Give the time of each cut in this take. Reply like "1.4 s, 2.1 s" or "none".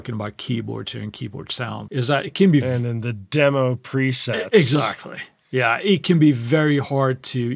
1.9 s